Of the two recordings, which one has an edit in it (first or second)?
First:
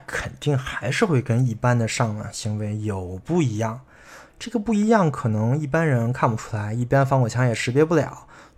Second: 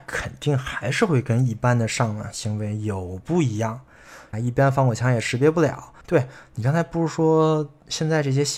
second